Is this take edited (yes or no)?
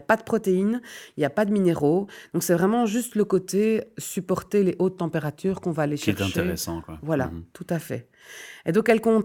no